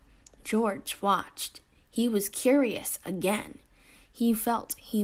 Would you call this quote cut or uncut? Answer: uncut